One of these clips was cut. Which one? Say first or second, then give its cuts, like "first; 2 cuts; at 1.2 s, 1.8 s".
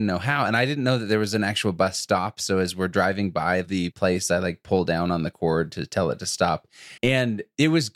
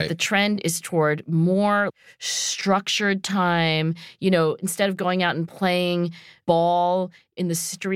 first; 1 cut; at 7.0 s